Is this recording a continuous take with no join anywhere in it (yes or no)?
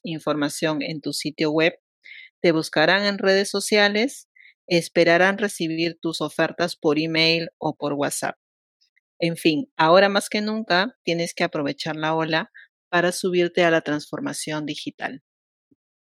yes